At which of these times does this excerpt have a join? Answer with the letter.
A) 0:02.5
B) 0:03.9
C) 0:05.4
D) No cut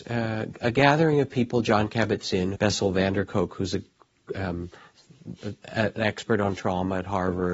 A